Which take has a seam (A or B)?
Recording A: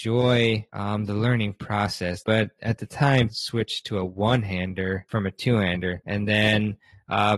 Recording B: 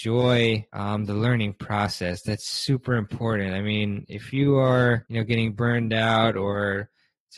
A